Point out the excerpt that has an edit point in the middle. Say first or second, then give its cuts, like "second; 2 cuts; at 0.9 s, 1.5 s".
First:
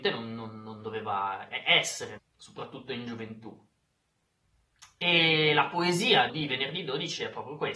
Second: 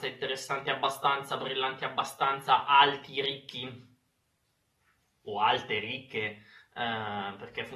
first; 2 cuts; at 2.2 s, 6.3 s